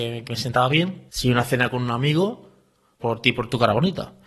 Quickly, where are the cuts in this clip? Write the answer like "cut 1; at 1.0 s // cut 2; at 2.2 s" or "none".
cut 1; at 1.1 s // cut 2; at 3.0 s

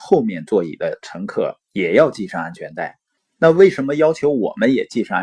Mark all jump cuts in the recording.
cut 1; at 3.2 s

